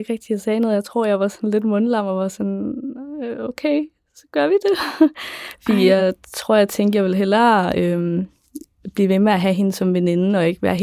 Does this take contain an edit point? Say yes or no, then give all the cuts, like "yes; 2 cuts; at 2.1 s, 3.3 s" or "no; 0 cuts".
no; 0 cuts